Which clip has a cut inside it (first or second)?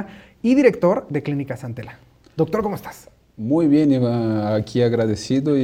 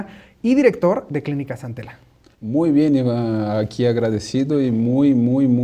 second